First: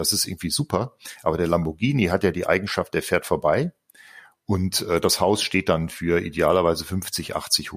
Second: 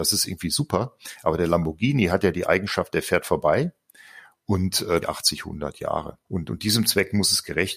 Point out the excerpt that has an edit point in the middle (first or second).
second